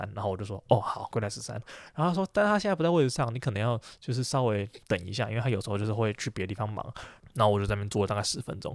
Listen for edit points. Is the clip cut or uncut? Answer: cut